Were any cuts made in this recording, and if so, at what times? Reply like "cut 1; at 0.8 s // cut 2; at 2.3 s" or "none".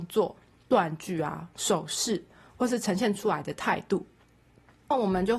none

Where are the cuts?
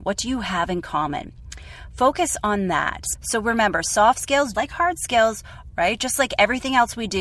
cut 1; at 3.1 s // cut 2; at 4.5 s // cut 3; at 5.7 s

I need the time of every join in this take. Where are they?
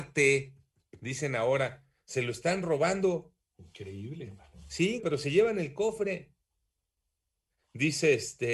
cut 1; at 5.0 s

